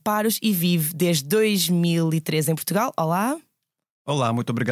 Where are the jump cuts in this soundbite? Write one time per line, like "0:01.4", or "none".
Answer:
none